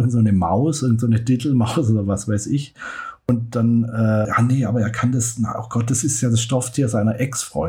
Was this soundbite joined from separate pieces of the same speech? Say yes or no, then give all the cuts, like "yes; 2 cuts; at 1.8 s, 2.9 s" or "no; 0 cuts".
yes; 1 cut; at 4.2 s